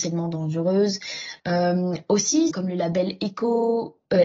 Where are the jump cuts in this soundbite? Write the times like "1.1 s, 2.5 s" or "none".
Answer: 1.4 s, 2.5 s